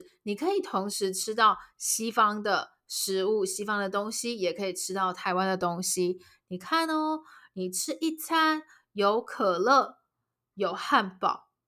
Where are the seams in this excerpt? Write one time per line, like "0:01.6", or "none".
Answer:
none